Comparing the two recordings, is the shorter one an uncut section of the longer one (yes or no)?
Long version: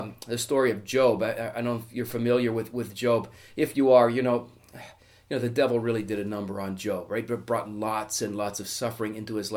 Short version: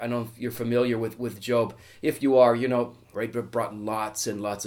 no